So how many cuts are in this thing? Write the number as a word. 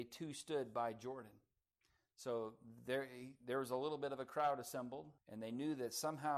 one